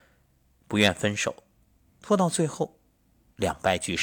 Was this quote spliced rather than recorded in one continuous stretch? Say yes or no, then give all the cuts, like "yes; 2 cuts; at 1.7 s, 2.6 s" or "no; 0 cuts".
yes; 1 cut; at 1.9 s